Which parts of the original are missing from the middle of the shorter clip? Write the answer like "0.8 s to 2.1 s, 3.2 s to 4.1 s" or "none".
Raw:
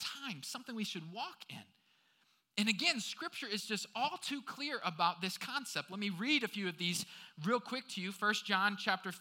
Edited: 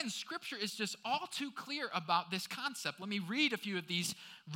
none